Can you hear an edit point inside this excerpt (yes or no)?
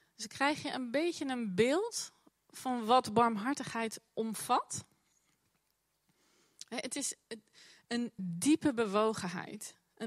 yes